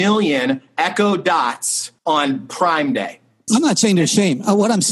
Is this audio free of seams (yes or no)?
no